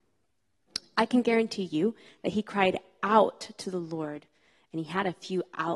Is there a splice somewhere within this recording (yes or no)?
no